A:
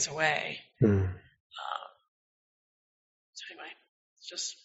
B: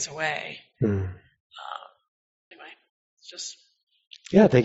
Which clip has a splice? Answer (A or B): B